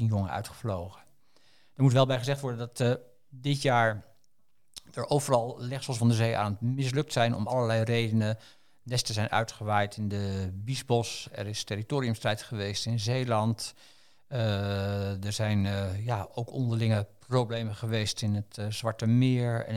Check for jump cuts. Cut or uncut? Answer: uncut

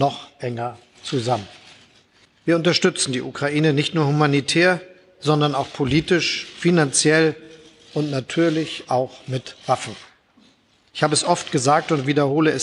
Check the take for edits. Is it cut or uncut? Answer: uncut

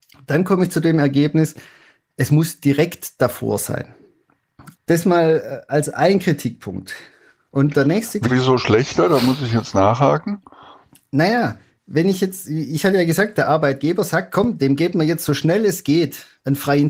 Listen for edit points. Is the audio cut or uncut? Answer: cut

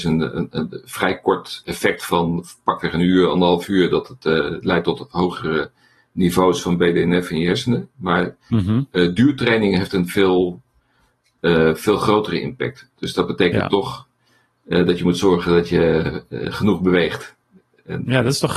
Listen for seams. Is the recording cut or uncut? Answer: uncut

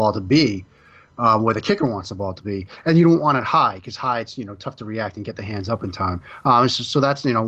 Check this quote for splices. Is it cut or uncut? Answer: uncut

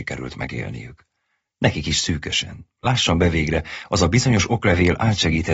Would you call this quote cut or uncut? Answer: uncut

